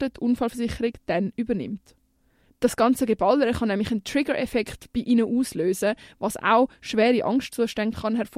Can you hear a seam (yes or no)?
yes